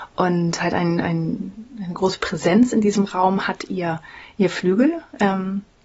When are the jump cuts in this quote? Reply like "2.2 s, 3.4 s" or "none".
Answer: none